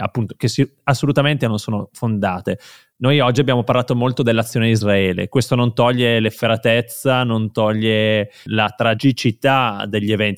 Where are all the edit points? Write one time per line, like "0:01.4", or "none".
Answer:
0:08.5